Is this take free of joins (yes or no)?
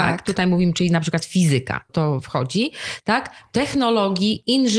no